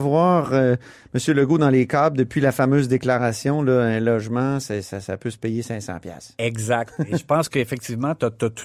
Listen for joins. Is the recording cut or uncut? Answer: uncut